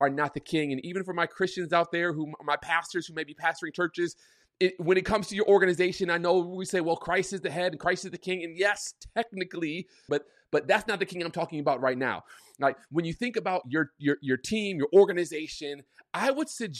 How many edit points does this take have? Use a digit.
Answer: 1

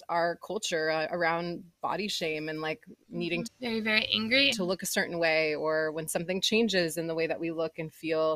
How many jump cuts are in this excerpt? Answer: 2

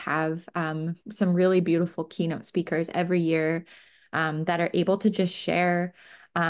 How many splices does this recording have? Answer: 0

